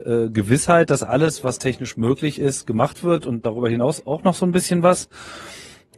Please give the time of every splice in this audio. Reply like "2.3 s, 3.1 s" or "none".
1.0 s